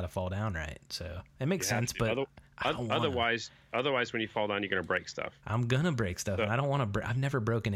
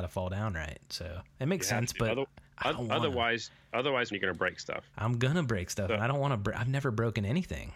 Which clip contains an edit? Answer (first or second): second